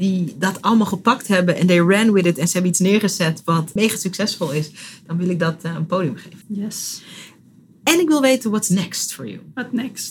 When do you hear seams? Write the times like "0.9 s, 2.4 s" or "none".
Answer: 3.8 s, 6.4 s